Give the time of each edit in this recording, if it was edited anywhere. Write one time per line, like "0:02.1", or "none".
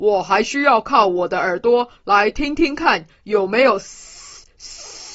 none